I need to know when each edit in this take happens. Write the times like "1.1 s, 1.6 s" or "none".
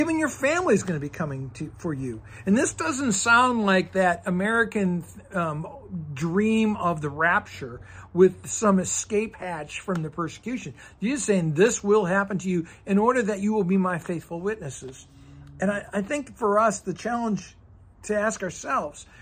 none